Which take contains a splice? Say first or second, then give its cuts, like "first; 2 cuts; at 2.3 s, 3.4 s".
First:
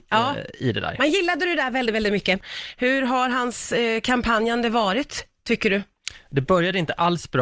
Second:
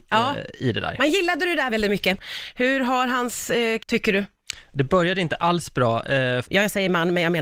second; 3 cuts; at 1.7 s, 3.8 s, 6.4 s